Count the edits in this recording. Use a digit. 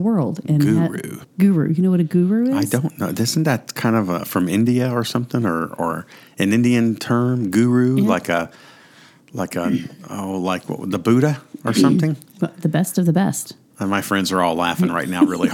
1